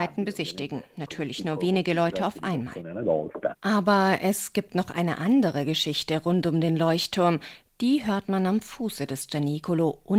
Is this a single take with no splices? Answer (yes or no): yes